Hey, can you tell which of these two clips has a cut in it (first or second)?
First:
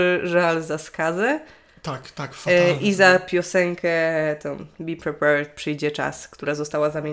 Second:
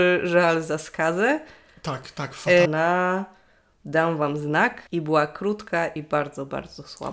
second